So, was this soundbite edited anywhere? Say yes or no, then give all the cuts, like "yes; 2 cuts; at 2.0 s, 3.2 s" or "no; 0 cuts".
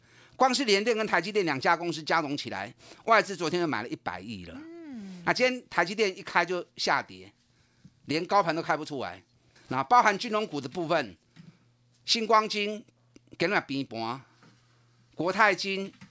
yes; 1 cut; at 9.6 s